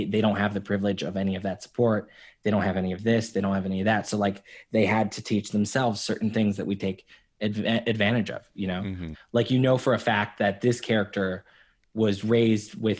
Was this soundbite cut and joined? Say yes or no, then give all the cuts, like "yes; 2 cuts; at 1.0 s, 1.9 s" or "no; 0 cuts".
yes; 1 cut; at 9.1 s